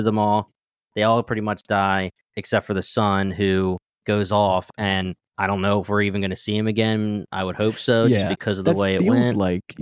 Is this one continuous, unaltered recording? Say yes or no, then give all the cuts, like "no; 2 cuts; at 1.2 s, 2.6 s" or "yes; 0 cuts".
yes; 0 cuts